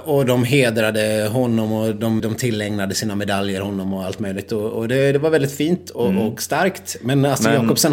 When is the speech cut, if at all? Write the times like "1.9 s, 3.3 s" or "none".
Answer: 2.2 s